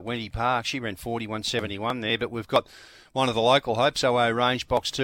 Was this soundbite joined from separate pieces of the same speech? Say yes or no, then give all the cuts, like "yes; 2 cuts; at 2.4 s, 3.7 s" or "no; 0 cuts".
no; 0 cuts